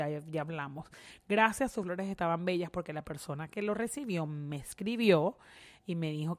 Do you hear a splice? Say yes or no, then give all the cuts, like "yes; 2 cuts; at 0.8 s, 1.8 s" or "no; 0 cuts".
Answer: no; 0 cuts